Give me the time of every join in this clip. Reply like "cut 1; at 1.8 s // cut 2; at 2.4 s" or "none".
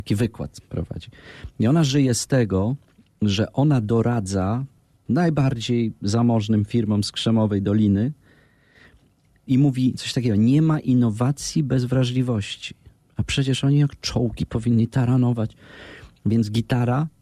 none